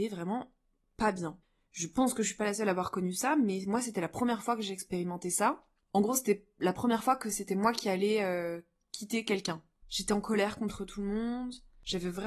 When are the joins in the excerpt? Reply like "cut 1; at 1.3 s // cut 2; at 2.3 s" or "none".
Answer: none